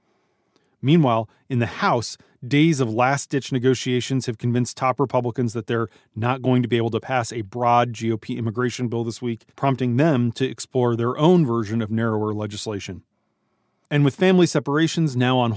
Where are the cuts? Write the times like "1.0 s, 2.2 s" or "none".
9.5 s